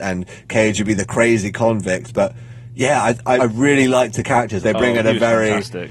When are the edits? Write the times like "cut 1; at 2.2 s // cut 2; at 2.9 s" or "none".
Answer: cut 1; at 3.4 s // cut 2; at 4.6 s